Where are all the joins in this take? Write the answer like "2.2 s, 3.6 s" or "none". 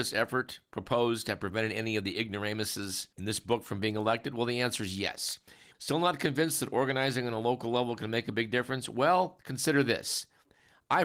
3.1 s, 5.7 s